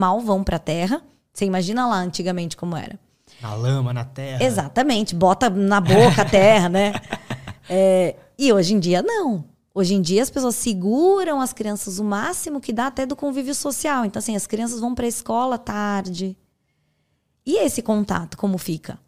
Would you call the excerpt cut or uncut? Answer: uncut